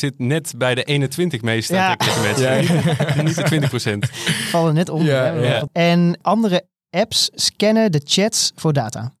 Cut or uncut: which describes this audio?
cut